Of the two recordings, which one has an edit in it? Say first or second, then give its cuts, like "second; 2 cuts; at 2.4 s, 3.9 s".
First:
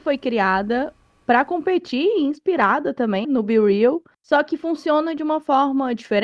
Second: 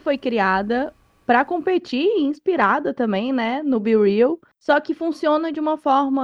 first; 1 cut; at 3.2 s